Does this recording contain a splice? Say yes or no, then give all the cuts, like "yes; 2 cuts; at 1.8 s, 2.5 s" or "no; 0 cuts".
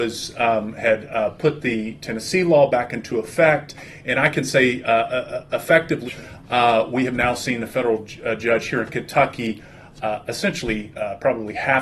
yes; 1 cut; at 6.1 s